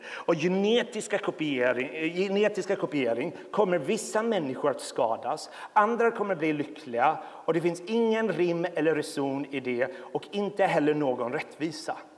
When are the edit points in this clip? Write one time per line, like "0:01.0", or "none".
none